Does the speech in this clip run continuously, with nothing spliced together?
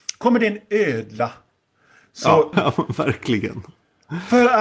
no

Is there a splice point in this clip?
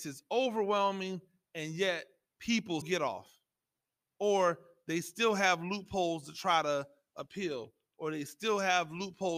yes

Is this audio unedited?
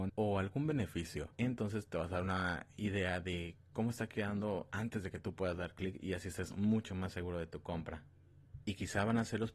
no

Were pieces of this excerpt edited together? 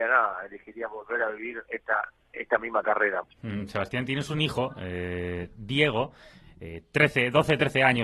yes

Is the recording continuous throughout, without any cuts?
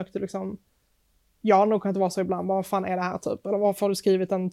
yes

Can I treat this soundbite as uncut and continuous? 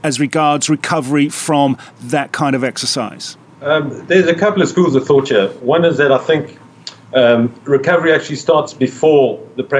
yes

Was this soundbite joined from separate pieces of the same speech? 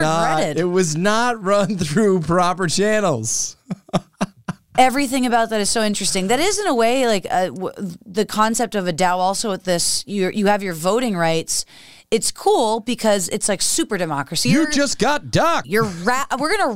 yes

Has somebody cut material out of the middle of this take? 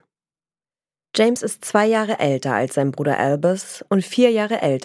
yes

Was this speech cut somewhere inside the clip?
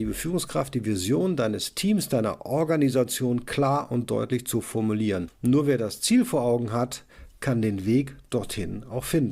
no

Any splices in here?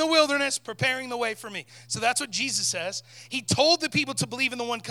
no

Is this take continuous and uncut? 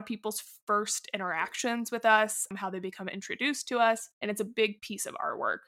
yes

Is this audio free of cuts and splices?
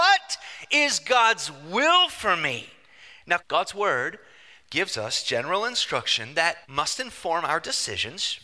no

